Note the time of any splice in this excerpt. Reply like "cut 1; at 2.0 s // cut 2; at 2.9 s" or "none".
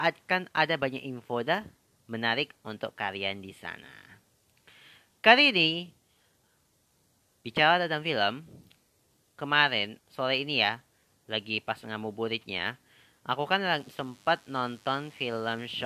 cut 1; at 10.0 s